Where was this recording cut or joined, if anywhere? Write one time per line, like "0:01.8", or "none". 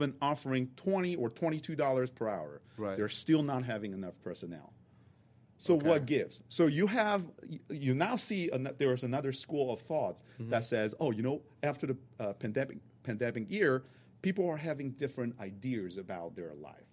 none